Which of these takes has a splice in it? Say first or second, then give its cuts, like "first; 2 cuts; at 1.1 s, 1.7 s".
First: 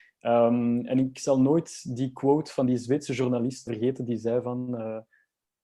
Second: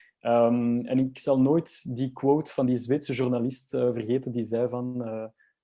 first; 1 cut; at 3.7 s